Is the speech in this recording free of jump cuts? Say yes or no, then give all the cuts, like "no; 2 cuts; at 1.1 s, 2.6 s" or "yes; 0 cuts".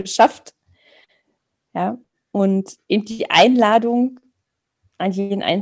yes; 0 cuts